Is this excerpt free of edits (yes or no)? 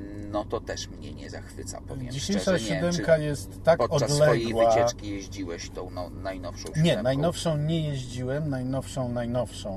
yes